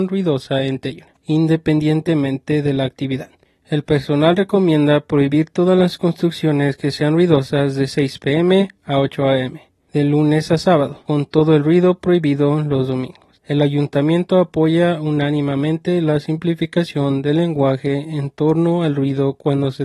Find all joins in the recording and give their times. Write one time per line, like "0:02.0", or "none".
none